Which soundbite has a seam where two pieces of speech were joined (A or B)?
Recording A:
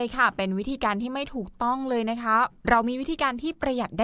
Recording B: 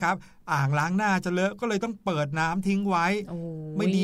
A